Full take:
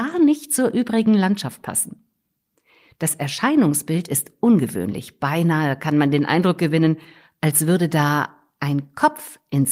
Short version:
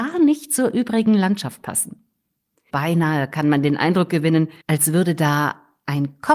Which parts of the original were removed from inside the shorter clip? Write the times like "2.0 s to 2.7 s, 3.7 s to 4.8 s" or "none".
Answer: 2.7 s to 5.2 s, 7.1 s to 7.3 s

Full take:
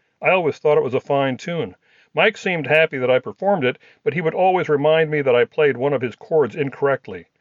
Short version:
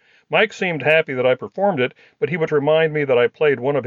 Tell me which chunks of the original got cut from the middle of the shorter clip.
4.3 s to 4.6 s

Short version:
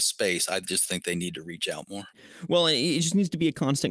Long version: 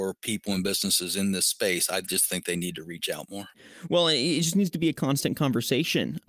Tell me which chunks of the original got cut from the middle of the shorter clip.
none

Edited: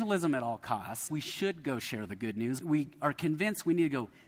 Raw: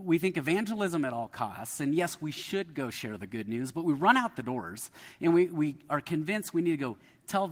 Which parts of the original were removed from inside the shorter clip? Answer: 1.8 s to 2.2 s, 3.7 s to 5.5 s

